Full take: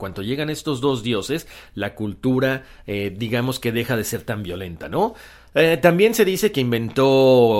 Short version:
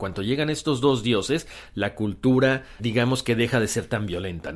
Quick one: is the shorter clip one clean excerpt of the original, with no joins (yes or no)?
no